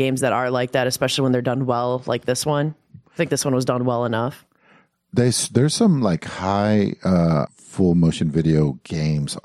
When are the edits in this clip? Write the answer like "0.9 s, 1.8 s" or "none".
7.5 s